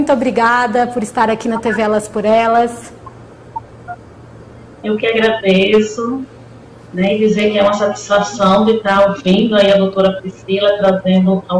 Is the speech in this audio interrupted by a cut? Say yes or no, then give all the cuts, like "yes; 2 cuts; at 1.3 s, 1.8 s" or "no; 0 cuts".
no; 0 cuts